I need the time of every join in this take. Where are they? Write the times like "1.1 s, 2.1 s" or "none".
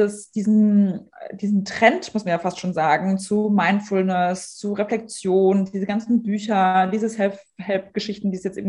none